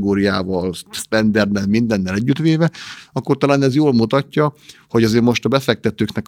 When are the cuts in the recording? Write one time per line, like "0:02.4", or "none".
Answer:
none